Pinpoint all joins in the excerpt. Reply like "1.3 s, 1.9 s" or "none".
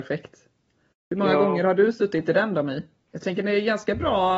3.1 s